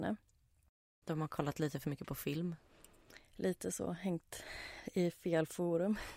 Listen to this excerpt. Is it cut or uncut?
cut